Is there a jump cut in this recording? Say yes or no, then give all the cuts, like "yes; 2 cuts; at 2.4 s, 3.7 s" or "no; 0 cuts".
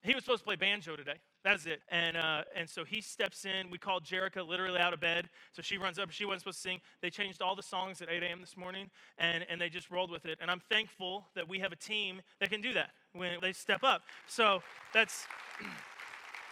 yes; 3 cuts; at 1.8 s, 13.4 s, 14.9 s